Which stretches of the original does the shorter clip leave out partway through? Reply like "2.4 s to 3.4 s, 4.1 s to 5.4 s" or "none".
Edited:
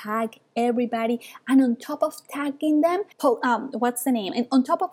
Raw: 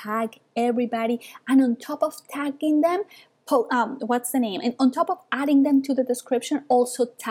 3.1 s to 3.4 s